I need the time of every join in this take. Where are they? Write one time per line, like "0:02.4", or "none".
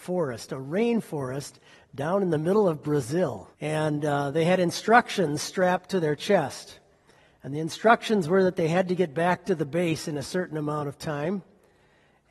0:03.5